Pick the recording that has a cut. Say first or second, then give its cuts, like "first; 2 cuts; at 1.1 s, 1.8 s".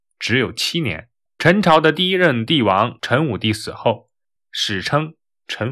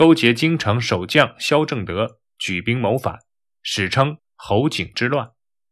first; 2 cuts; at 1.3 s, 4.4 s